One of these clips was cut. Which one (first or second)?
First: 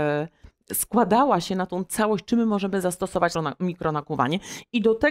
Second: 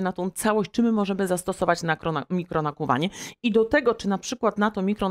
first